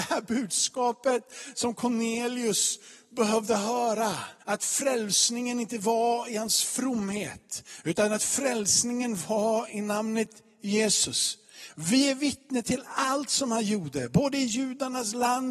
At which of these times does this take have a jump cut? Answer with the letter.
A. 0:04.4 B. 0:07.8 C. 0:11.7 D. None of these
A